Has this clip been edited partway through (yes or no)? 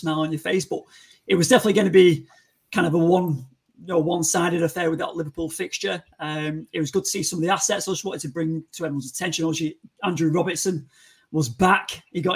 no